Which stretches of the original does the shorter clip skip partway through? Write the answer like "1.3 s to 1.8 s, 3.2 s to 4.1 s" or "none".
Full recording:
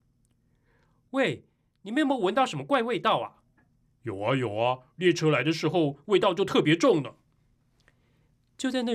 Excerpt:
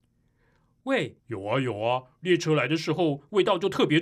1.5 s to 3.9 s